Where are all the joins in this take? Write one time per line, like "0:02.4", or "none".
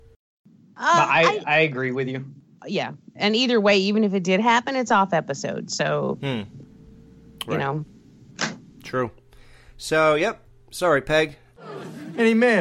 none